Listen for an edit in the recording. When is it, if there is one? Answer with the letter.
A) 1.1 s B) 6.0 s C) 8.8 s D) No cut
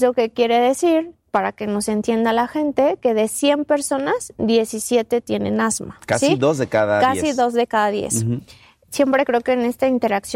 C